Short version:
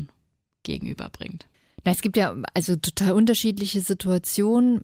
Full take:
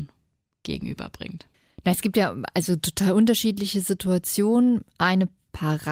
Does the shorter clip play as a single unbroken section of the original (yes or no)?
yes